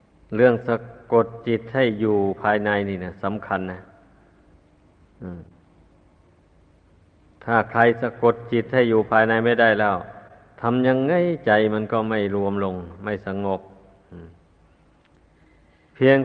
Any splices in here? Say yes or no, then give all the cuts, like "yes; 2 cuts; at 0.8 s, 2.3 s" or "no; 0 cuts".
no; 0 cuts